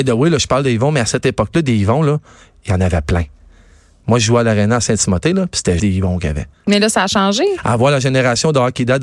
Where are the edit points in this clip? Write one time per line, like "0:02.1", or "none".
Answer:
0:05.8